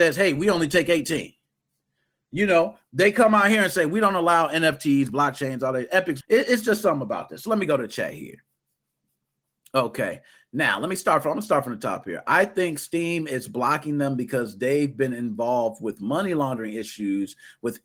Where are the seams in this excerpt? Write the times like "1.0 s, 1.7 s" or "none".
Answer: 6.2 s